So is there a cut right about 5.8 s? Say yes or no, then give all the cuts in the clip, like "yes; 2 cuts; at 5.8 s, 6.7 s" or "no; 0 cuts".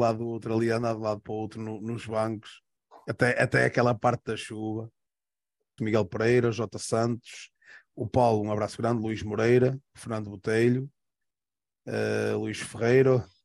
yes; 1 cut; at 5.8 s